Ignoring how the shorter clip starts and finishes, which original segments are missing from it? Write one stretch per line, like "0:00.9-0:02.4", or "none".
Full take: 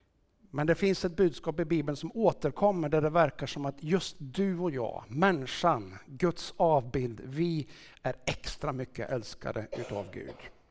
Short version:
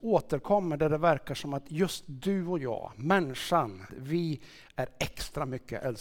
0:06.0-0:07.2